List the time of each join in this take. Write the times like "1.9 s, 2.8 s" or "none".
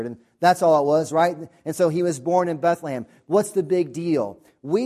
none